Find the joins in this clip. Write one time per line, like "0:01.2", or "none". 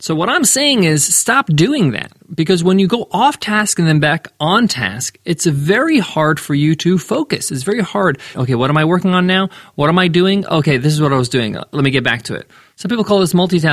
0:08.3